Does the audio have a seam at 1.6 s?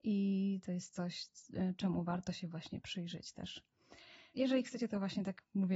no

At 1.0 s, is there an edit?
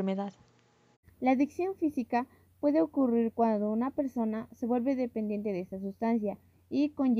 yes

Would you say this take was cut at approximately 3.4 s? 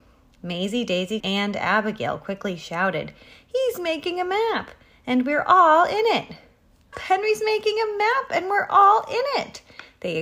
no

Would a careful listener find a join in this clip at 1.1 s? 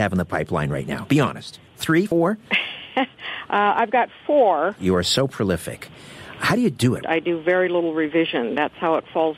no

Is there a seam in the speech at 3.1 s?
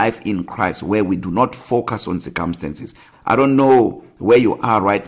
yes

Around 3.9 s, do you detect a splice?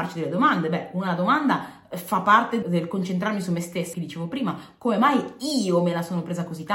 yes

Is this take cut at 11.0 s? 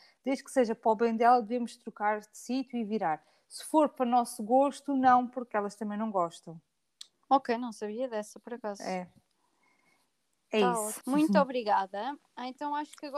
yes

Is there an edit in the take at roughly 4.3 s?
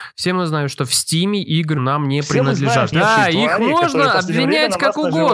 no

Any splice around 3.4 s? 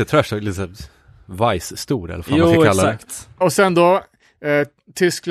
yes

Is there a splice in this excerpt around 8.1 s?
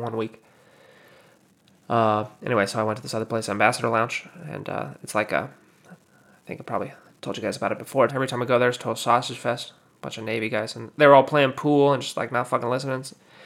yes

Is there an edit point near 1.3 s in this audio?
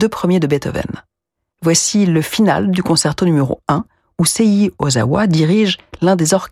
no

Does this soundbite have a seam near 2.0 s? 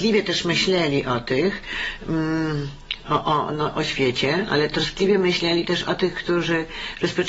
no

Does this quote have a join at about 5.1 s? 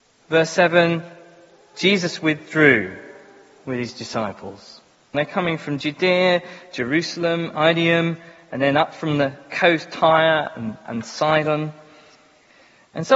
yes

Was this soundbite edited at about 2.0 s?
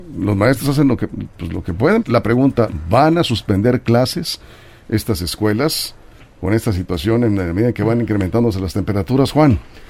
yes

